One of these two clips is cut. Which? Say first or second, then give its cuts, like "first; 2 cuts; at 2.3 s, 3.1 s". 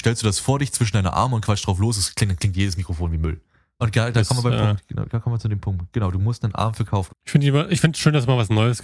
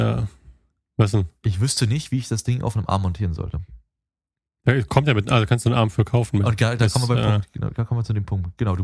first; 2 cuts; at 3.8 s, 7.1 s